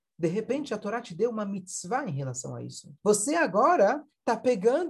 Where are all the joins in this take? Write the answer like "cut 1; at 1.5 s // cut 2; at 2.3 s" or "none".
cut 1; at 3.0 s